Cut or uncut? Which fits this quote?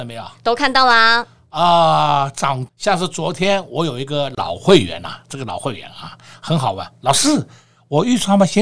cut